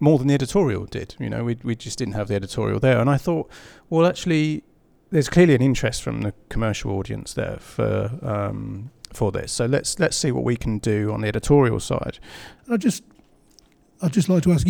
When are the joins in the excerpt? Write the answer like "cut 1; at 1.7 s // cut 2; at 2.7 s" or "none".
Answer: cut 1; at 12.6 s